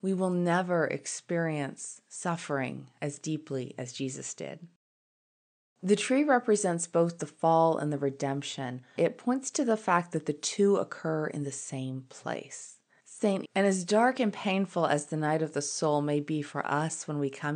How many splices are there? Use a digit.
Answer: 2